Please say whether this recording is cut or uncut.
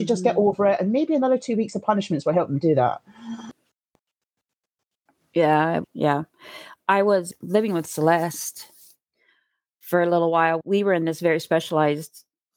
uncut